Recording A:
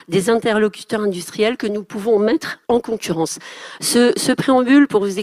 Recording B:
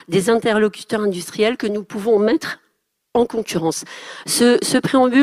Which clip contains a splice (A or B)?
A